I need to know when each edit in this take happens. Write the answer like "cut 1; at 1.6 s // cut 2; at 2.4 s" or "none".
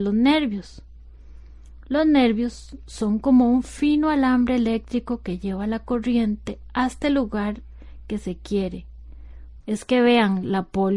cut 1; at 9.6 s